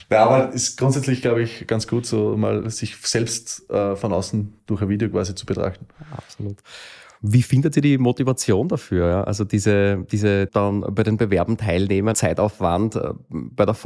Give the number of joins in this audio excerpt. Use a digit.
2